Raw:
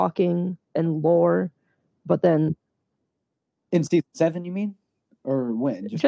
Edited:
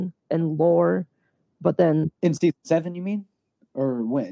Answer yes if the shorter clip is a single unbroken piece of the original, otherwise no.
no